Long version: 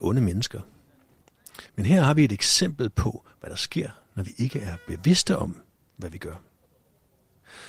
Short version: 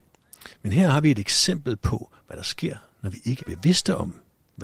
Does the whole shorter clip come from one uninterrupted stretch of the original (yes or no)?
no